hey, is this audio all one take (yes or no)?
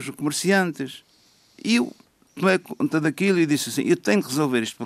yes